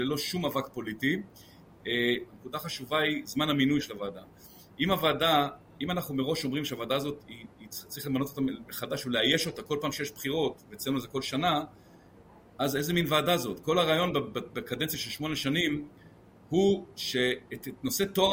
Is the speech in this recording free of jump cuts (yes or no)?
no